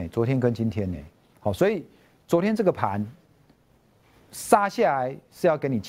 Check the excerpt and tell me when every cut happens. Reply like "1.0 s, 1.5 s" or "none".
1.3 s